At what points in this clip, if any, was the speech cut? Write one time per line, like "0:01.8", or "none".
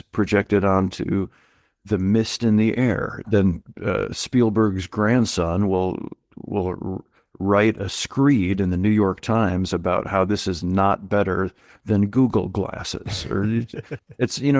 0:03.2